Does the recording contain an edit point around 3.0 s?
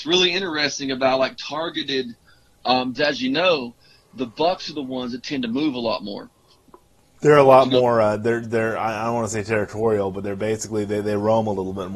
yes; 1 cut; at 3.0 s

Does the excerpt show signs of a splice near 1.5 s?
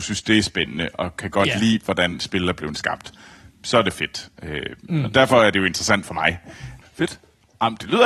no; 1 cut; at 6.8 s

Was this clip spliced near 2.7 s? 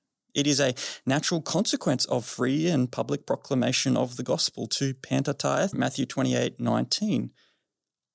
no; 1 cut; at 5.7 s

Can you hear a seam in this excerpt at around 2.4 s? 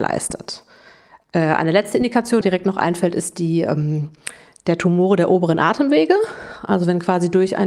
yes; 1 cut; at 2.4 s

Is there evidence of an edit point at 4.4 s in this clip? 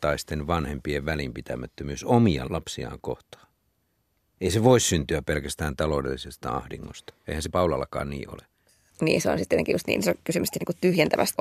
yes; 1 cut; at 4.4 s

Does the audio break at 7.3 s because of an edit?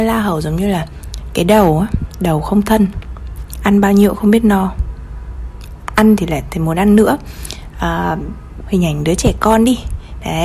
no; 1 cut; at 8.6 s

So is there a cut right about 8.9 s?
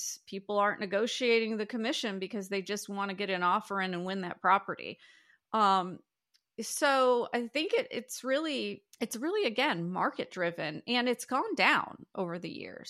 yes; 1 cut; at 8.9 s

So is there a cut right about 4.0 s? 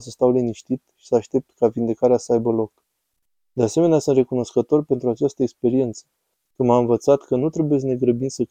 no; 0 cuts

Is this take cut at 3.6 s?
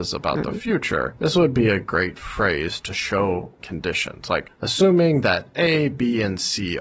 yes; 1 cut; at 3.6 s

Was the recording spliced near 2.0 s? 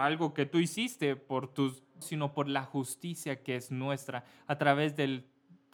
yes; 1 cut; at 2.0 s

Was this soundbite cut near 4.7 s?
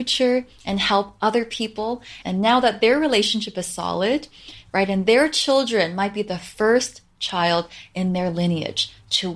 yes; 2 cuts; at 2.2 s, 4.7 s

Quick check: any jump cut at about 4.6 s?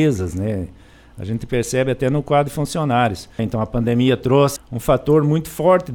yes; 2 cuts; at 3.4 s, 4.6 s

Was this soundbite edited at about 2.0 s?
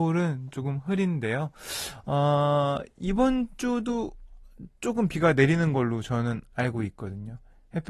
no; 0 cuts

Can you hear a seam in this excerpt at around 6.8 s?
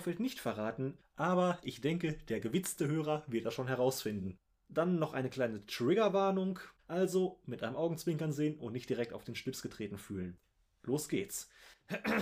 yes; 2 cuts; at 1.0 s, 6.8 s

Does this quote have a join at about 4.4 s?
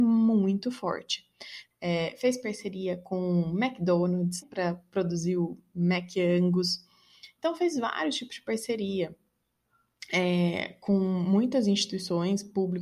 yes; 2 cuts; at 1.7 s, 4.4 s

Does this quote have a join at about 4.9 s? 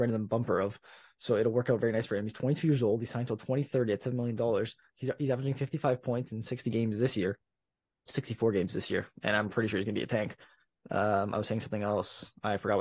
no; 0 cuts

